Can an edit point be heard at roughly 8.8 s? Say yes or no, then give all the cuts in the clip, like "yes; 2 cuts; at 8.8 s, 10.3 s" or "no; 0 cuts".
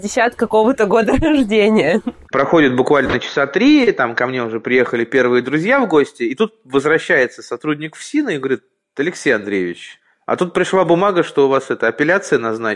no; 1 cut; at 2.3 s